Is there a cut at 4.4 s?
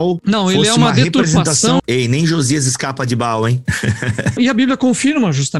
yes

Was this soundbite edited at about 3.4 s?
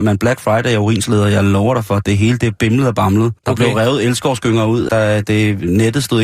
yes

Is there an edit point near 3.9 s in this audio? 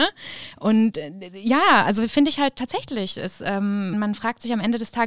yes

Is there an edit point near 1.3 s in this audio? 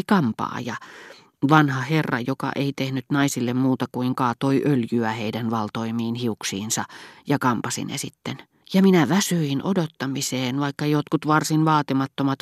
no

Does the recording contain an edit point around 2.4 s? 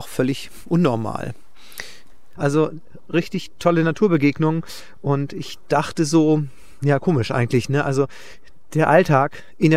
yes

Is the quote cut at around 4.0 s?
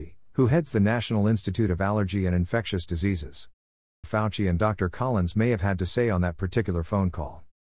yes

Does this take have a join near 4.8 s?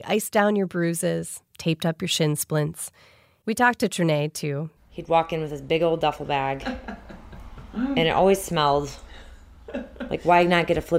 yes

